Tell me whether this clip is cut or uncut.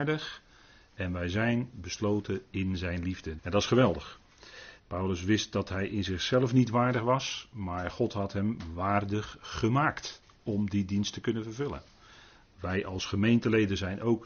cut